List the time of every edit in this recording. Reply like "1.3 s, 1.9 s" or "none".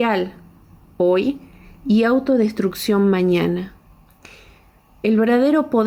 none